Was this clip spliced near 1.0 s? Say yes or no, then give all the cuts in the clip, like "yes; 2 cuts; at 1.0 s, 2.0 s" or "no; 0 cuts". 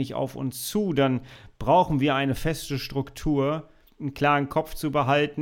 no; 1 cut; at 3.9 s